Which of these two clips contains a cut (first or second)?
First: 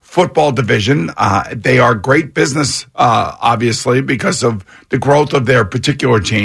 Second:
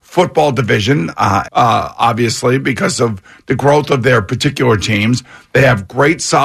second